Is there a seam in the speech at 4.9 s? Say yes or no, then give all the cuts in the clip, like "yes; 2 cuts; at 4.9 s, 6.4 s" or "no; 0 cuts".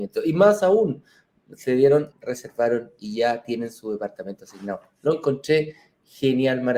no; 1 cut; at 2.1 s